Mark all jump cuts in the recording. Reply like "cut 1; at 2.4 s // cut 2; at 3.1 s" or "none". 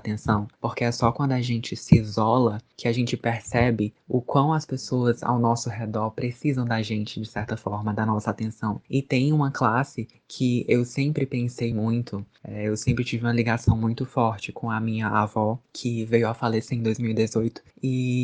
none

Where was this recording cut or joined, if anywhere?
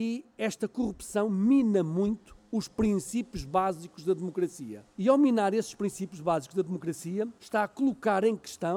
cut 1; at 4.9 s // cut 2; at 7.4 s

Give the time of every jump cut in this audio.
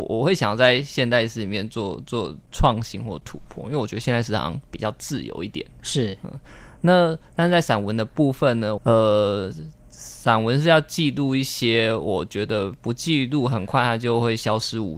cut 1; at 8.8 s

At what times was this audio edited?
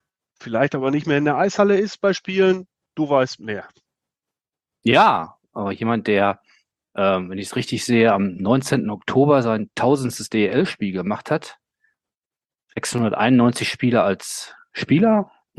none

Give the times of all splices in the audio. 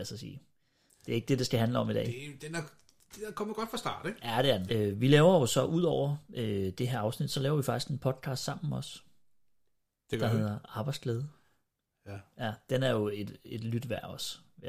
cut 1; at 4.7 s

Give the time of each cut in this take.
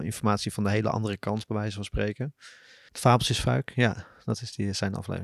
cut 1; at 2.9 s

